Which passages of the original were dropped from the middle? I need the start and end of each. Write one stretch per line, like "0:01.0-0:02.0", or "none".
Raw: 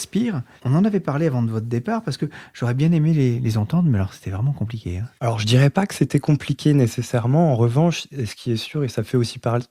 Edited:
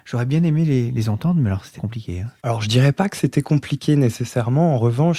0:04.2-0:04.5